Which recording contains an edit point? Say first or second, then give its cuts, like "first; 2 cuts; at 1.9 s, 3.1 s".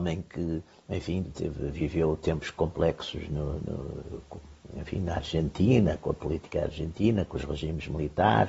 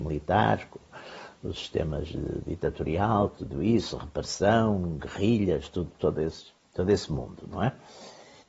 first; 1 cut; at 1.2 s